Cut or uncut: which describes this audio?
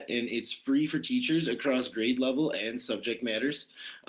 uncut